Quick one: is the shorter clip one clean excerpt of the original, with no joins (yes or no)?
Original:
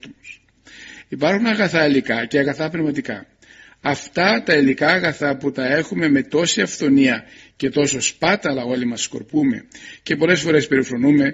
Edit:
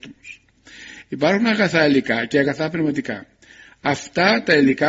yes